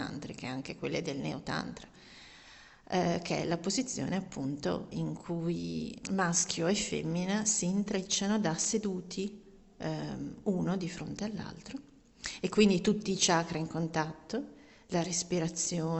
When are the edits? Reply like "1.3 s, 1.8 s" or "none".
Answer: 4.9 s, 6.0 s